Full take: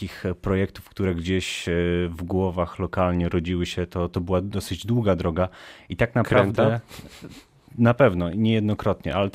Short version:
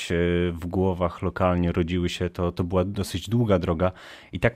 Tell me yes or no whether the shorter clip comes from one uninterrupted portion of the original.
yes